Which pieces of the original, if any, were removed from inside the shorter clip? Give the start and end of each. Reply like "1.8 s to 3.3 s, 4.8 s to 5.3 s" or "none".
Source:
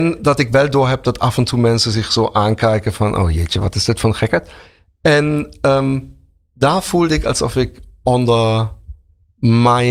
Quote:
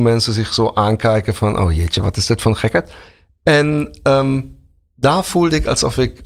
none